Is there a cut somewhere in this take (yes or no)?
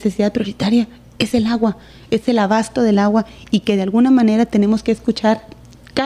no